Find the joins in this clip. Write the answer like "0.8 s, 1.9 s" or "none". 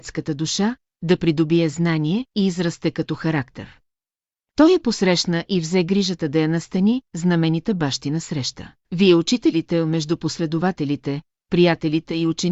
4.5 s, 8.8 s